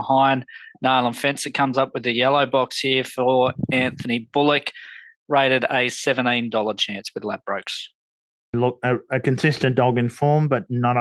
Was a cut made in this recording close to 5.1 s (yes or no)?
no